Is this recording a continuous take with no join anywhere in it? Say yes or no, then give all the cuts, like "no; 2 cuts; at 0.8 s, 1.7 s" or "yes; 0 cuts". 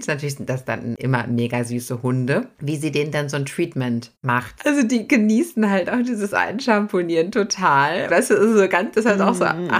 no; 2 cuts; at 4.6 s, 8.1 s